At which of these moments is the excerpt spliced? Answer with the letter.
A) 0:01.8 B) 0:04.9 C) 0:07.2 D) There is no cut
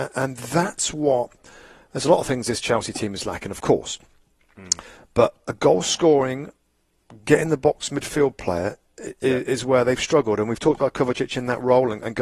D